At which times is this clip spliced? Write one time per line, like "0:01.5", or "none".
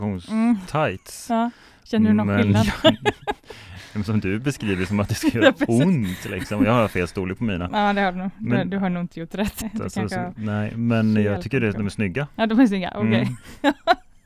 0:09.6